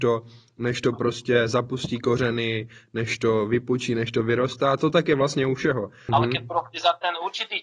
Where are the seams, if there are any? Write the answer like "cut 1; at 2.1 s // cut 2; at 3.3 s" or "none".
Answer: cut 1; at 6.1 s